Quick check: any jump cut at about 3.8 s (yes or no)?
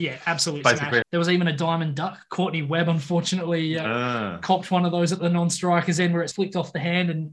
no